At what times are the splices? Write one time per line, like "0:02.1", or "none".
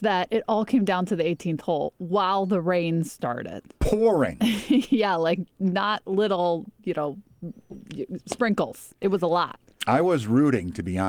none